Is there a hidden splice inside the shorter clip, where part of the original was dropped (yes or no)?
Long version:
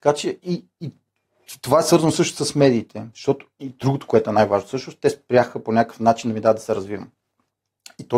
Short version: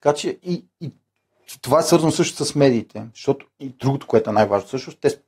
no